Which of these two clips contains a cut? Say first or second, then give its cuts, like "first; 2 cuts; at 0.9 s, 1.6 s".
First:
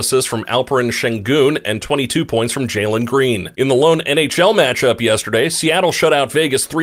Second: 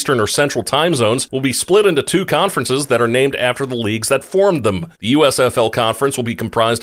second; 1 cut; at 4.9 s